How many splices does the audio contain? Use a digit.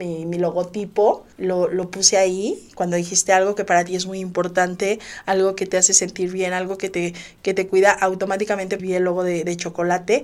2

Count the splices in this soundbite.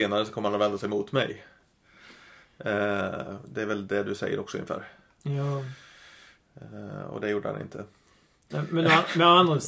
0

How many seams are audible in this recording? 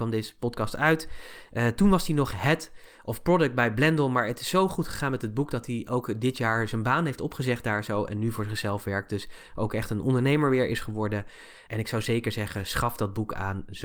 1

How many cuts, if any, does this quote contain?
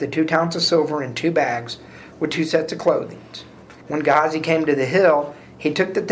1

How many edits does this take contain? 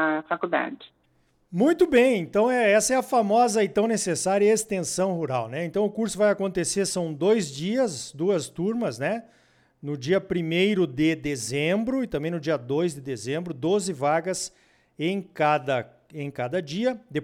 0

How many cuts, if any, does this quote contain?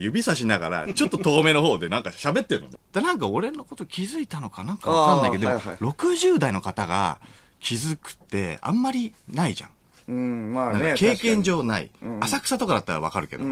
1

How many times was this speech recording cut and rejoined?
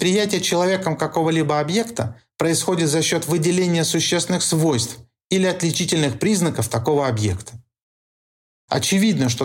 0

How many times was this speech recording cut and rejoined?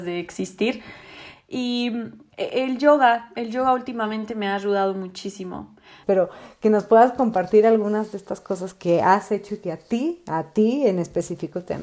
1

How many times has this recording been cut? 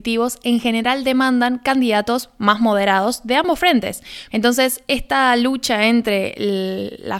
1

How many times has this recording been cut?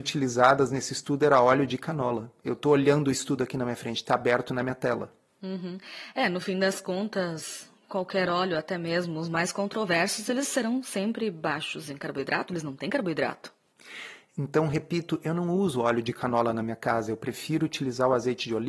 0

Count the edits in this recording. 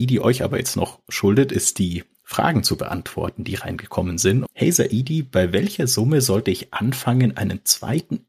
1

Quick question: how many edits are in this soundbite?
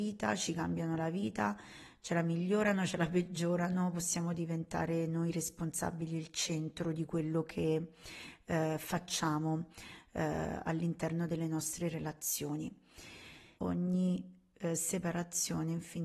1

